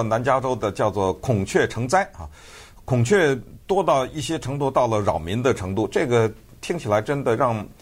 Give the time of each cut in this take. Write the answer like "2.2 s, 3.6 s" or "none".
none